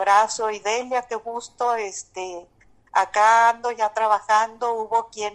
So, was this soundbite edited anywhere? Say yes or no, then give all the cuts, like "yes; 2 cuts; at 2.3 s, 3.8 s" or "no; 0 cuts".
no; 0 cuts